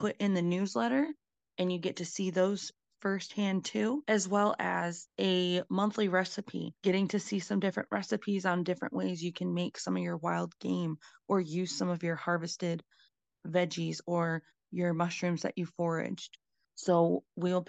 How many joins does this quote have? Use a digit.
1